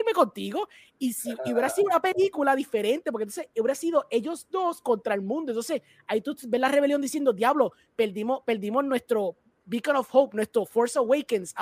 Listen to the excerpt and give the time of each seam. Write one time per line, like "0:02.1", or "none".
none